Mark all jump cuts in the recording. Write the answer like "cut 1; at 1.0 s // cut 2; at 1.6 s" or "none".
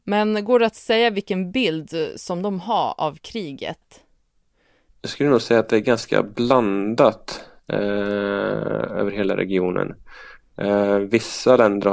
none